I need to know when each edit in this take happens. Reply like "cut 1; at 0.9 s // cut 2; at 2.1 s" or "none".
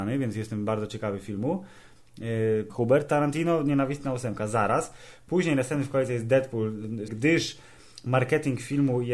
cut 1; at 2.7 s // cut 2; at 7.1 s